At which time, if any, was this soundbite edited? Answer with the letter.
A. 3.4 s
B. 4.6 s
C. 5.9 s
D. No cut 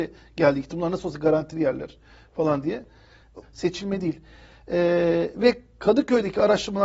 A